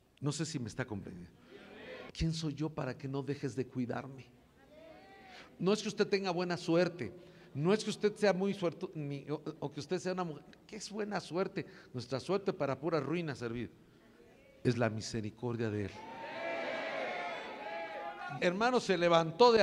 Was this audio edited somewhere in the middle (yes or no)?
yes